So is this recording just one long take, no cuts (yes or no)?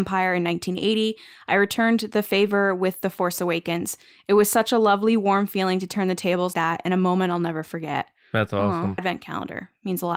no